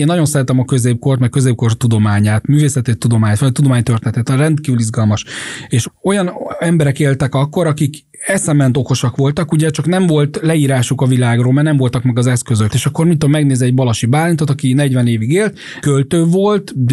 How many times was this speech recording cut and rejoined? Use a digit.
3